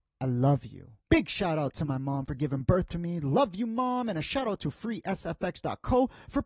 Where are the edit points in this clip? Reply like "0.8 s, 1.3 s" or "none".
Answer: 1.0 s